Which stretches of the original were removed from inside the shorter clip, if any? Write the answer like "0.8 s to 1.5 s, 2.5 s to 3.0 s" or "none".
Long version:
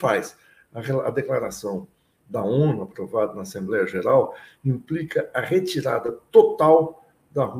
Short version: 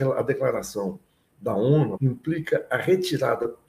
2.8 s to 4.6 s